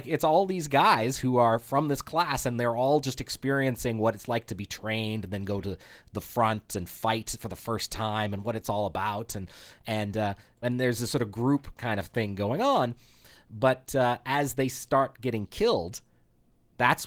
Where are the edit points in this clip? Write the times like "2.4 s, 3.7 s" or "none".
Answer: 10.6 s